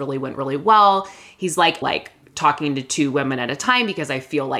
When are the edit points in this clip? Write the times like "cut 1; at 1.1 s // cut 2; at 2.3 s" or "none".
cut 1; at 1.8 s

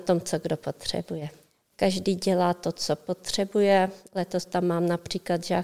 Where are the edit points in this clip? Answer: cut 1; at 1.7 s

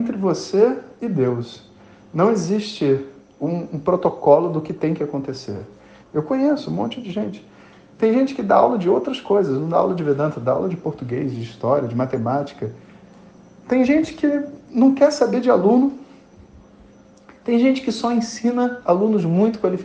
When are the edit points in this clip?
cut 1; at 6.0 s

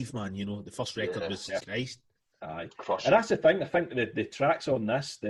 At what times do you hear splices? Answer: cut 1; at 1.6 s

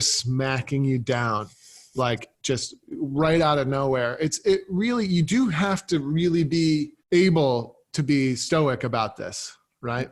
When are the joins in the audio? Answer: cut 1; at 7.0 s

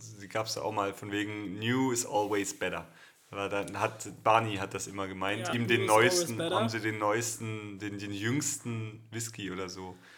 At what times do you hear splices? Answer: cut 1; at 5.5 s

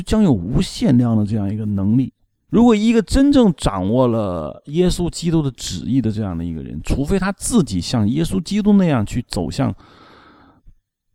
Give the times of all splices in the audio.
cut 1; at 2.5 s

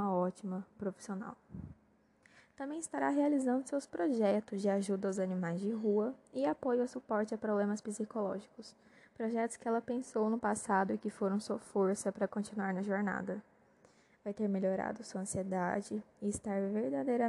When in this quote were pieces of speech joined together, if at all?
none

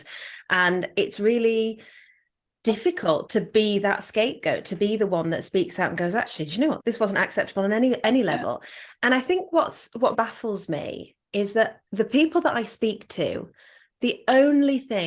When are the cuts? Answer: cut 1; at 6.8 s // cut 2; at 10.1 s // cut 3; at 11.8 s

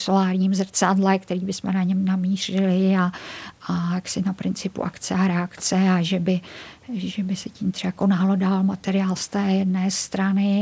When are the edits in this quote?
none

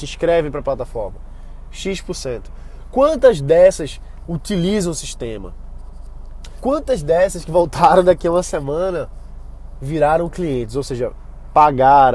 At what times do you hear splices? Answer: cut 1; at 4.2 s // cut 2; at 6.6 s

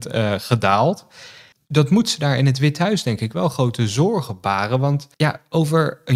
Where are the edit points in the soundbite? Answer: cut 1; at 5.1 s

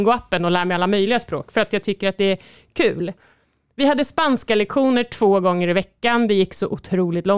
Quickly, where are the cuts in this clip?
none

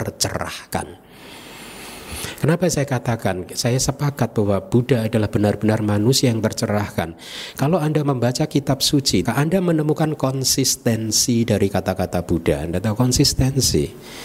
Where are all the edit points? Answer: cut 1; at 9.3 s

